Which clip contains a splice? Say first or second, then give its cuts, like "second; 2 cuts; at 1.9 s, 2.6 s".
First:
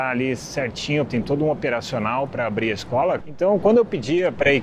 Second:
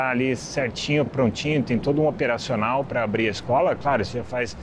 first; 2 cuts; at 1.1 s, 3.2 s